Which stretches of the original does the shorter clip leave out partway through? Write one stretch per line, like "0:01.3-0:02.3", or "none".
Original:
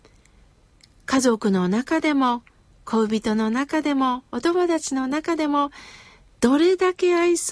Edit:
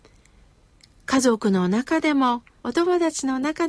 0:02.6-0:04.3

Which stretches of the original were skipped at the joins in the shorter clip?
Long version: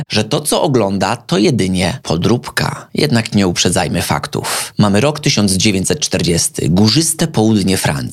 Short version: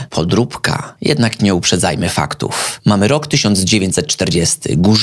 none

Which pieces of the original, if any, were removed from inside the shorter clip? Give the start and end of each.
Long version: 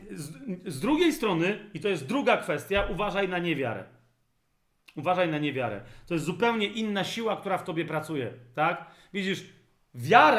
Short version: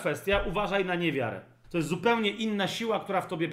0:04.1-0:06.0

